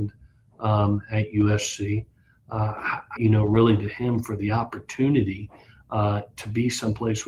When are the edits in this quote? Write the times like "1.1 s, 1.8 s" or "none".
3.2 s